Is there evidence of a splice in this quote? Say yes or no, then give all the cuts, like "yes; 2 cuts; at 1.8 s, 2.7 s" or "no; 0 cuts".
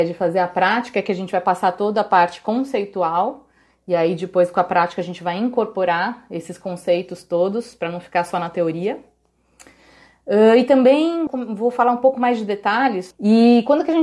yes; 2 cuts; at 11.3 s, 13.1 s